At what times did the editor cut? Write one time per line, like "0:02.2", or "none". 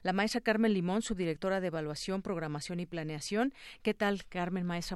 none